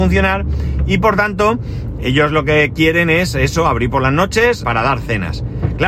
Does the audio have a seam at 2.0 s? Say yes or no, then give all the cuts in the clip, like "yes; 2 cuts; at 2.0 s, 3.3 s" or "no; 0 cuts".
yes; 2 cuts; at 2.0 s, 4.6 s